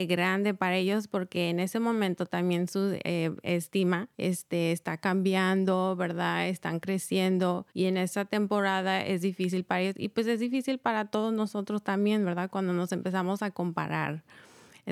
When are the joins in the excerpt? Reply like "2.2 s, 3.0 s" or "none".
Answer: 4.1 s, 7.7 s

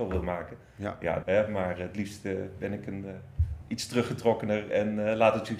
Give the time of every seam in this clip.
1.2 s

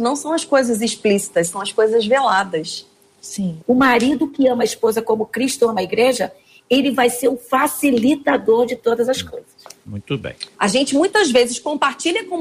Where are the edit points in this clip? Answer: 3.6 s, 10.5 s

